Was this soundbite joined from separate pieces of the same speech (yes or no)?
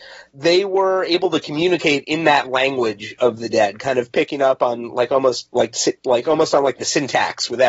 no